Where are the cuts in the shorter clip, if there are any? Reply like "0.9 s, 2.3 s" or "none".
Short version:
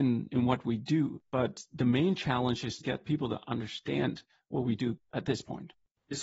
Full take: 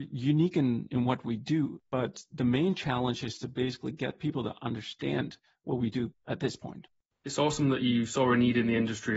2.8 s